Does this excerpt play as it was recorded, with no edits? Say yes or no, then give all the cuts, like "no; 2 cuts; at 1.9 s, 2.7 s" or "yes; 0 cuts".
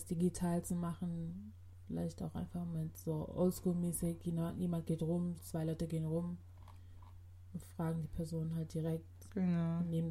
no; 1 cut; at 5.4 s